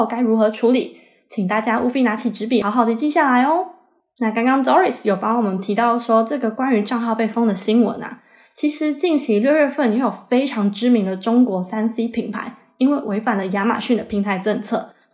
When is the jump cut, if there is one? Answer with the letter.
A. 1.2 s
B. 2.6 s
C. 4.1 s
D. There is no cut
B